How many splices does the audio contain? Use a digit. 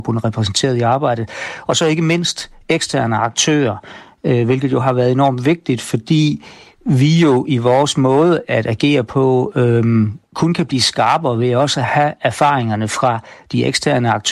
0